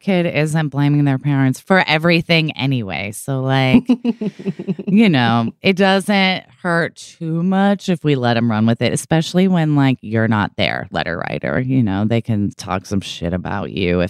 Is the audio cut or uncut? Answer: uncut